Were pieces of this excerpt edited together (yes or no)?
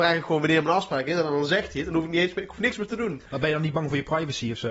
no